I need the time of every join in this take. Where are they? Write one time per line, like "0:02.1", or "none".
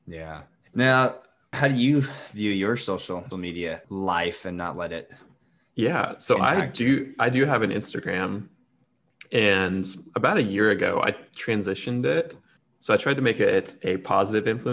none